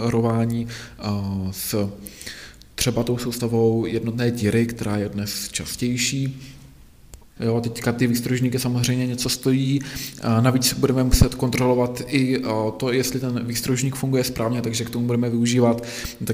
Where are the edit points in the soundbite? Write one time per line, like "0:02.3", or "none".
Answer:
0:07.4